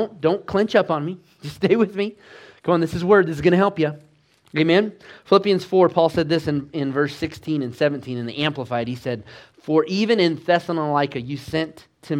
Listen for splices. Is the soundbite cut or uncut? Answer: uncut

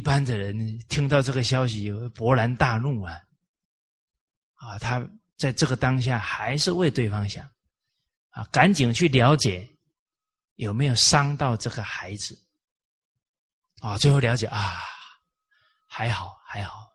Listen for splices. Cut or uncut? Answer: uncut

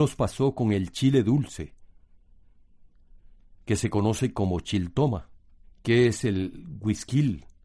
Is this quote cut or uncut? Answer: cut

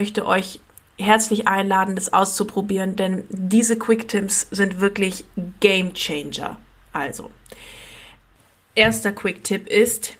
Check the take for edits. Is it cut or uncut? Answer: cut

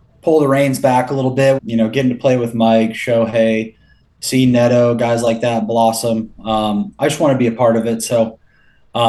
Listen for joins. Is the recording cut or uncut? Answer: cut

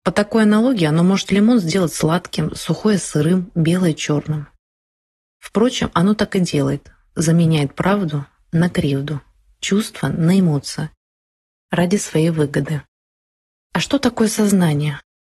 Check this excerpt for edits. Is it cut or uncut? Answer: uncut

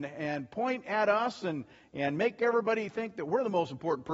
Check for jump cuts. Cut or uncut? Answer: uncut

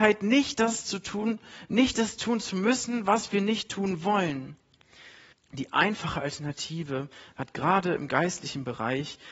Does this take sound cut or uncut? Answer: cut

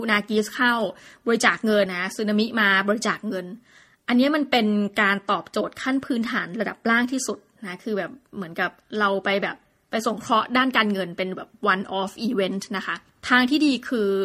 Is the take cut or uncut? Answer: cut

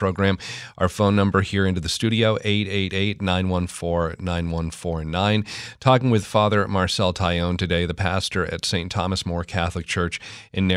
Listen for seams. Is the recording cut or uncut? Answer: uncut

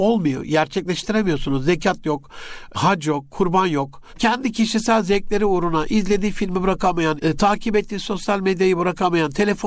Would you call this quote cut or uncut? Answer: cut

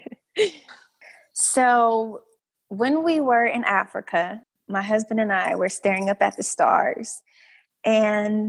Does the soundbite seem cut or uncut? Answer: uncut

